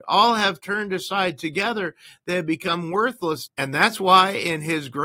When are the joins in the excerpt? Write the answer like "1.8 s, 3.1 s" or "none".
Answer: 3.5 s